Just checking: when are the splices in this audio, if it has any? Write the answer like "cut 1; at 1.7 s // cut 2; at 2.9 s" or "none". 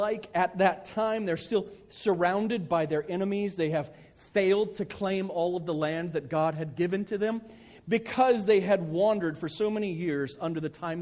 none